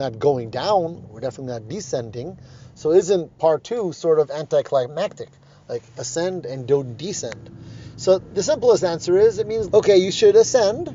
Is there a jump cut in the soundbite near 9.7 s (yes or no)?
yes